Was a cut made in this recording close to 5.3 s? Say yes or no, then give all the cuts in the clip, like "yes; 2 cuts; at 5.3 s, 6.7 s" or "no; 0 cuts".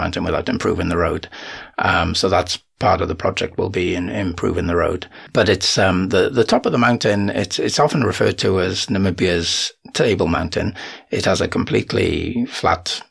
no; 0 cuts